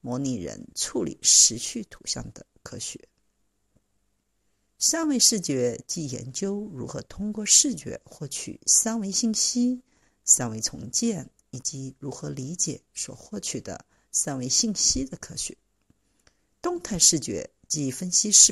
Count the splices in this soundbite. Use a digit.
1